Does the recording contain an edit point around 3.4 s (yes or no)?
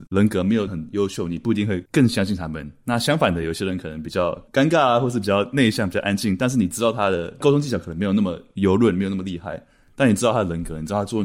no